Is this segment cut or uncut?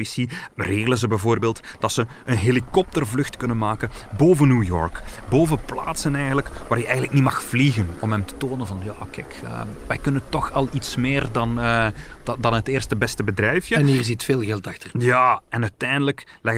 uncut